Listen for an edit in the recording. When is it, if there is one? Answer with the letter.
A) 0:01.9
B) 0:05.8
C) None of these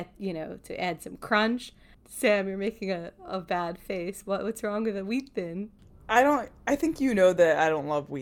A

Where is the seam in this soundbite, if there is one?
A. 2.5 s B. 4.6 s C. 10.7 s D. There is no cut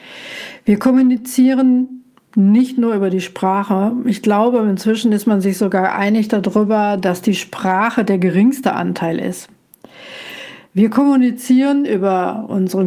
D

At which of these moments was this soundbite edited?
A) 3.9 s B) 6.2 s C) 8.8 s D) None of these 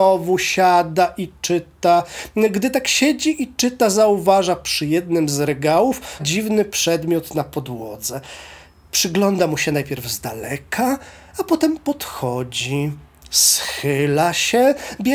B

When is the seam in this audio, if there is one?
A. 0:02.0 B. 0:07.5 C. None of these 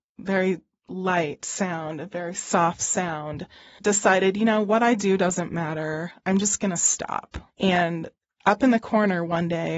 B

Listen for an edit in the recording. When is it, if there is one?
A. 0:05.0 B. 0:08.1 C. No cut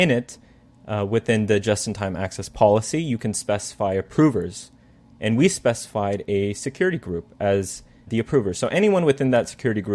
B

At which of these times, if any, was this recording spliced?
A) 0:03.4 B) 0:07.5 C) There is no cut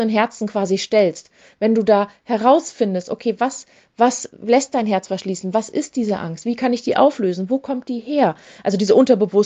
C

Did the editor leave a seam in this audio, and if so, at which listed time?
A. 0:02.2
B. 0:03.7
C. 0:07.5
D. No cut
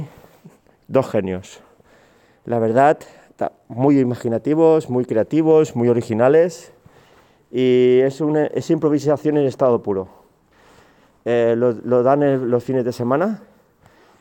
D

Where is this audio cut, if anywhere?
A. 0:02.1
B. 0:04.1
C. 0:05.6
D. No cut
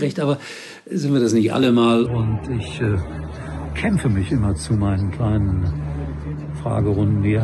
A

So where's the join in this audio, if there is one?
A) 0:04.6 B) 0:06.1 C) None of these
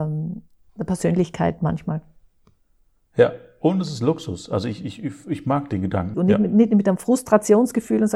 B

